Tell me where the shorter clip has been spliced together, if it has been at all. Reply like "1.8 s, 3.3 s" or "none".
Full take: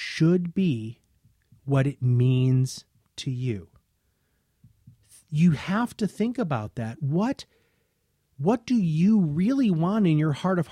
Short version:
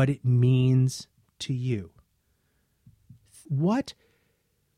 3.4 s